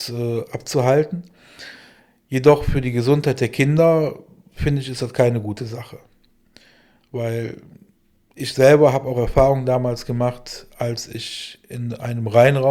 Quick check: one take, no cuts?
yes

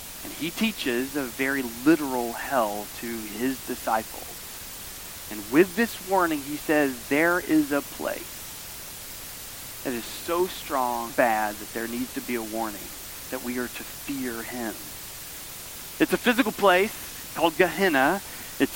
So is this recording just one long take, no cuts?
no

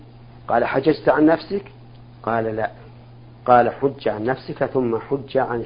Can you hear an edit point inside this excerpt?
no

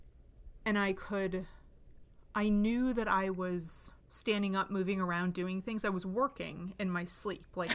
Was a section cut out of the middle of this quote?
yes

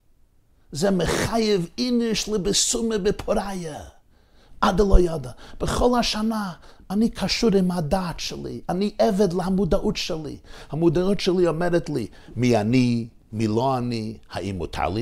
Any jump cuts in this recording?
no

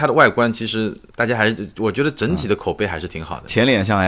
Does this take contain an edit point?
yes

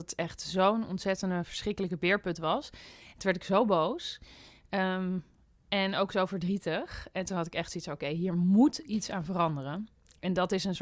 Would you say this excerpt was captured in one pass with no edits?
yes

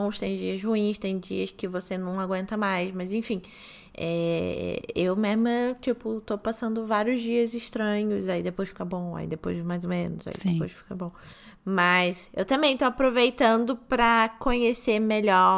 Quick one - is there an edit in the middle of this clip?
no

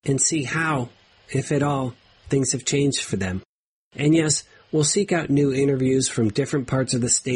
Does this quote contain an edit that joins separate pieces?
no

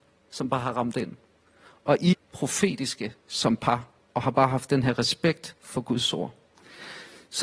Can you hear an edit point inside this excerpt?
yes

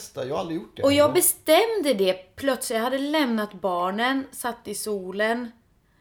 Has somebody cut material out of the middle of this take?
no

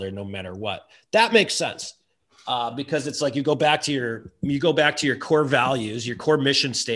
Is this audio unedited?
yes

